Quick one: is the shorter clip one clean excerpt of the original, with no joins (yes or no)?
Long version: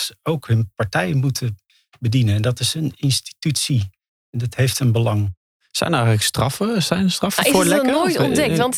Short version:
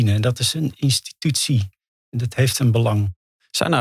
yes